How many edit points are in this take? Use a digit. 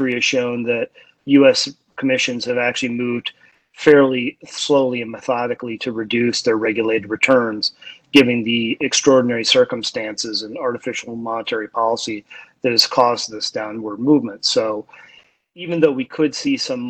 0